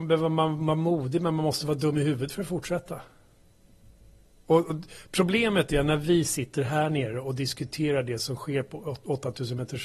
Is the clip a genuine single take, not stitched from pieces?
yes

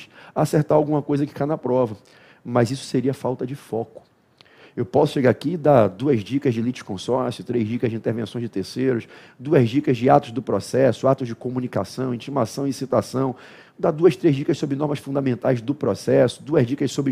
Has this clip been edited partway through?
no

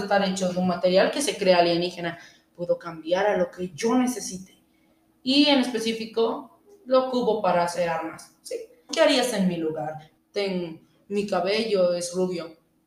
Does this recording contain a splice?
yes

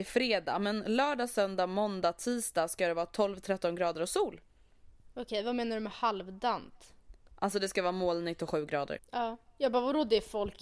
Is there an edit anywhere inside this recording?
yes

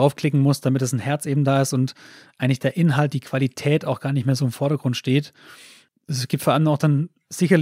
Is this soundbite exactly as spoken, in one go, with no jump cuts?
yes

